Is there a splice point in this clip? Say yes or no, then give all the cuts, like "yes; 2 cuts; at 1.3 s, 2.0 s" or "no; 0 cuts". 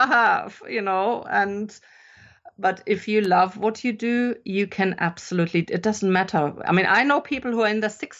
no; 0 cuts